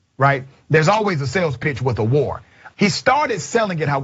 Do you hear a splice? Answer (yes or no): yes